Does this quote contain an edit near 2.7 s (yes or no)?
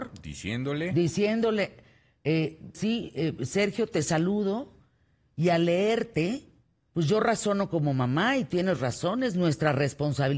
yes